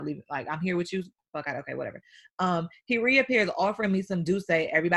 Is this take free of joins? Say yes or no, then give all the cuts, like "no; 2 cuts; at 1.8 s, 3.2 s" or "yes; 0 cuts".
yes; 0 cuts